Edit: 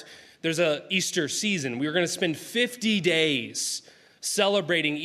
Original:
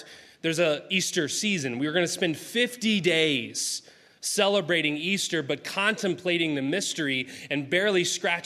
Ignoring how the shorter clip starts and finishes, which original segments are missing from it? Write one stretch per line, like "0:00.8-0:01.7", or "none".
none